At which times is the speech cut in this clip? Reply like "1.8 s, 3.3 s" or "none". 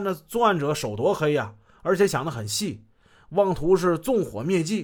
none